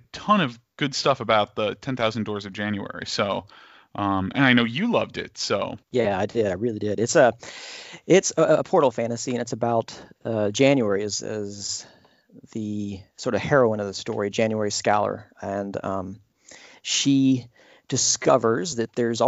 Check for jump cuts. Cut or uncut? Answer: cut